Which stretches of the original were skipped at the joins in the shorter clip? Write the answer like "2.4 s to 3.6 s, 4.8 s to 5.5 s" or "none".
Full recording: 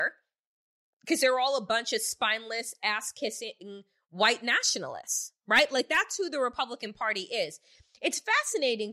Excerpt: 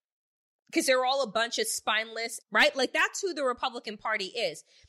2.8 s to 5.4 s